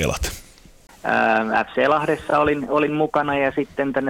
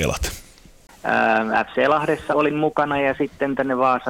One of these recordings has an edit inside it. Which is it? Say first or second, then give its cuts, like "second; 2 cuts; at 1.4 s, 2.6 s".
second; 1 cut; at 2.3 s